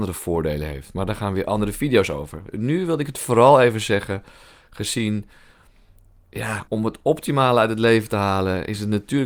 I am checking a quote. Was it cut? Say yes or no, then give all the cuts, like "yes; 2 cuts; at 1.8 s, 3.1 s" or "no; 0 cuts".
yes; 1 cut; at 6.7 s